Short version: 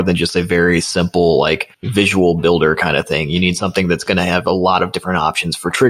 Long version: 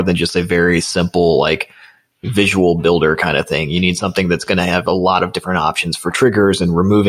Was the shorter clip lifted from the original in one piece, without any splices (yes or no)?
no